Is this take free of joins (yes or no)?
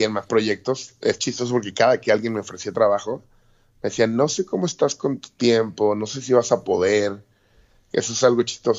yes